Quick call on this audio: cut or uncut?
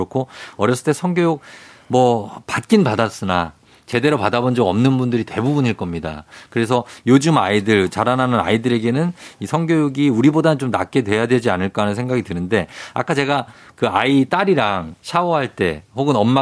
cut